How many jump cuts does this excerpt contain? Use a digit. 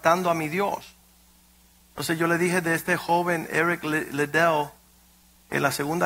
0